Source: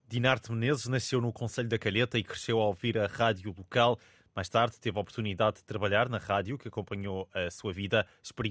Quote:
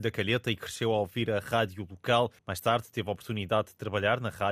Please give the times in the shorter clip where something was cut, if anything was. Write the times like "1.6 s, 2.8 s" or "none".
2.4 s